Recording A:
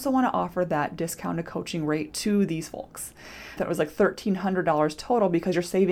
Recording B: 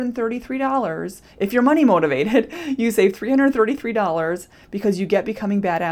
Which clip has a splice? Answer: A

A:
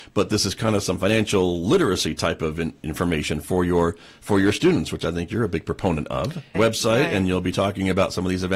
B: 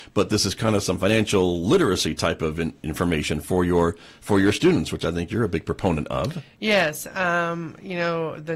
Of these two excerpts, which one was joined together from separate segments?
A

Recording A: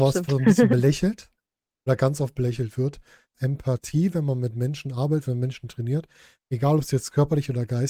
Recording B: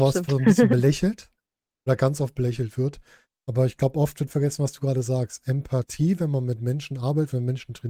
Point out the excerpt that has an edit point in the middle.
A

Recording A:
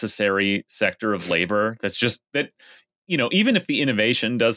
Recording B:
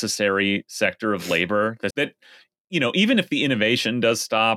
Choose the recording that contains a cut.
B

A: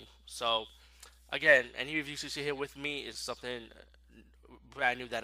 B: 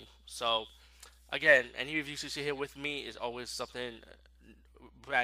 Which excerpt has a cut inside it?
A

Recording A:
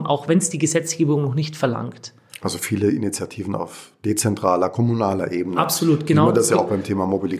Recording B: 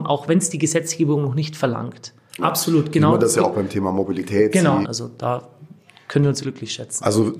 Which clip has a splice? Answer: B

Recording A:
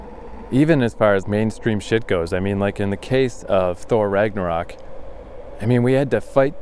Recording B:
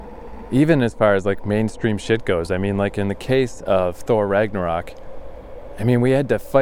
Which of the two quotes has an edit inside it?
A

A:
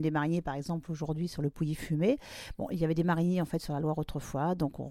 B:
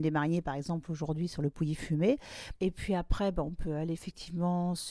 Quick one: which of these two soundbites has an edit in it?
B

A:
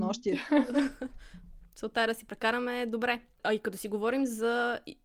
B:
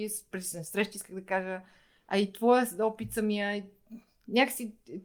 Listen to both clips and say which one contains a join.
A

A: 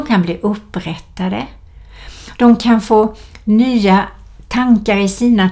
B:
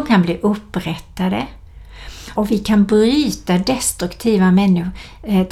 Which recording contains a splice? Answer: B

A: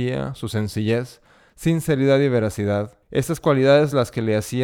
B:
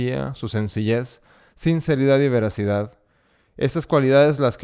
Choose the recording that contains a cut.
A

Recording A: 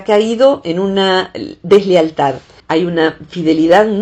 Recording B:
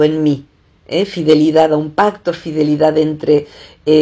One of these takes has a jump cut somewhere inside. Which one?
A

